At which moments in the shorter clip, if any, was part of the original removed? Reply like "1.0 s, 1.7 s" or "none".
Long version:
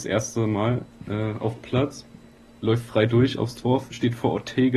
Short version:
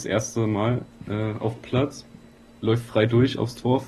none